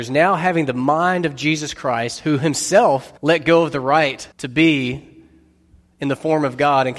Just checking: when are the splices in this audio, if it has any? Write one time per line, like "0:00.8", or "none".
0:03.2
0:04.3